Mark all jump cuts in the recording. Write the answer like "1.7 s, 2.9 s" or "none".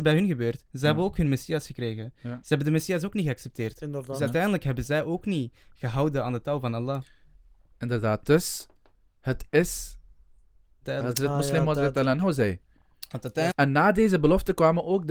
10.8 s, 13.5 s